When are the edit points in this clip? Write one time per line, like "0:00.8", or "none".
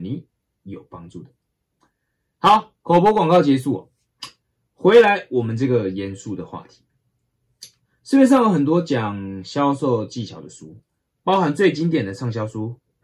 none